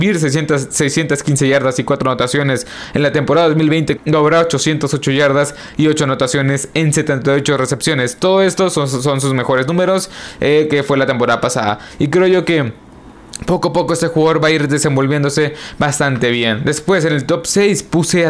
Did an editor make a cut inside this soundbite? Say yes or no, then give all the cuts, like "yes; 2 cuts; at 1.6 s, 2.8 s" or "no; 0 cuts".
yes; 1 cut; at 4.0 s